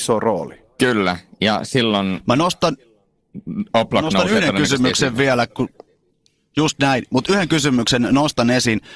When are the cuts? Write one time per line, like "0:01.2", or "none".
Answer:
none